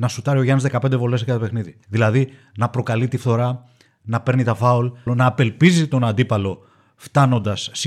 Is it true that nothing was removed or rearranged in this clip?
no; 2 cuts; at 1.8 s, 5.1 s

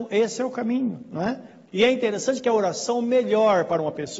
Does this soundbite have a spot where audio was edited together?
yes; 1 cut; at 1.7 s

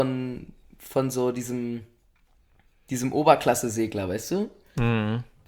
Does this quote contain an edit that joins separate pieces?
no; 0 cuts

